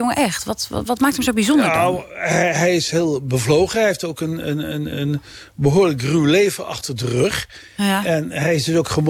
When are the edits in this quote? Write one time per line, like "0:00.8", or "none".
0:04.9